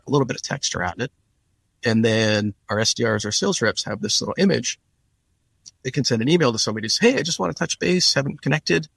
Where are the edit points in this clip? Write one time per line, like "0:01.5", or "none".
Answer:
none